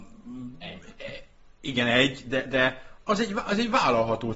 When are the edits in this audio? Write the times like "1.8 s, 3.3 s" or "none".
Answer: 2.5 s